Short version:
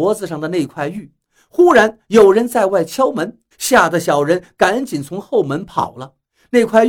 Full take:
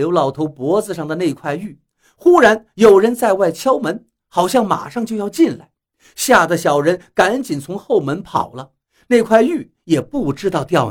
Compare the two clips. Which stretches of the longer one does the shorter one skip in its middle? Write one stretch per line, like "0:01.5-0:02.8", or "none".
0:04.2-0:06.1